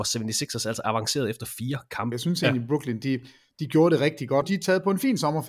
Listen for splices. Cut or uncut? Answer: cut